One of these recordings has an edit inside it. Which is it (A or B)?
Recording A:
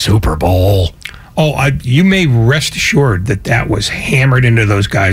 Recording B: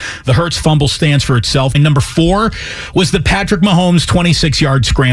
B